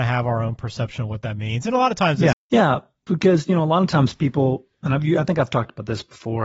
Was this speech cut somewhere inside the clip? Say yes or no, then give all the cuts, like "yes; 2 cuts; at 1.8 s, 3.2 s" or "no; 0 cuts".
yes; 1 cut; at 2.3 s